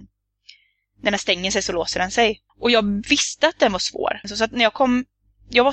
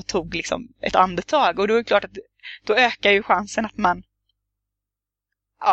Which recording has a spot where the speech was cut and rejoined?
first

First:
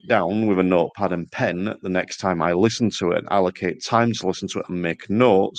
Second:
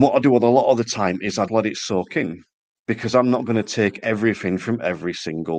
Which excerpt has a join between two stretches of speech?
second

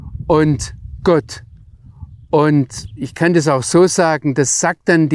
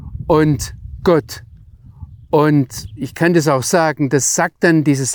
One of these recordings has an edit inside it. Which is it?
second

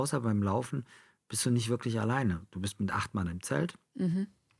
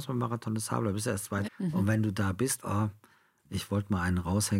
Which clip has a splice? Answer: second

